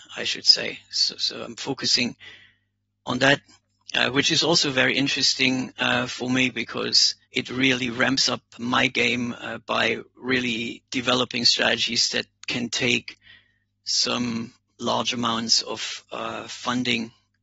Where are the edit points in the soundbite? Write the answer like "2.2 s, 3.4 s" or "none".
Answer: 7.2 s, 8.6 s, 10.9 s